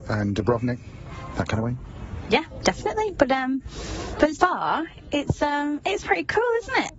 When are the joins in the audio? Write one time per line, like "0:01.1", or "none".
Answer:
0:04.3